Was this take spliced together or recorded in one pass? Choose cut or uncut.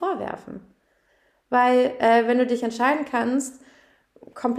uncut